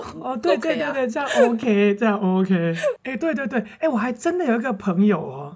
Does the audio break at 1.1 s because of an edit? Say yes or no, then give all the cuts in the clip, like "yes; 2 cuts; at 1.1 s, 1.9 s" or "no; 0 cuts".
no; 1 cut; at 3.0 s